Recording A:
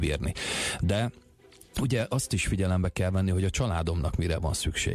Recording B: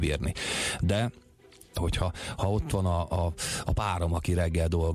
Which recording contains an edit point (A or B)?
B